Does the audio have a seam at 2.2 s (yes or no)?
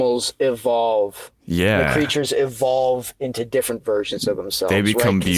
no